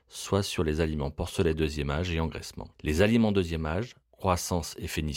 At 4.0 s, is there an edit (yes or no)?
yes